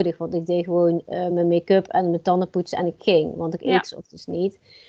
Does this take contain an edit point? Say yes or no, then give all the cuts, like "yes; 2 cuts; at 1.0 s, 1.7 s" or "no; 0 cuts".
no; 0 cuts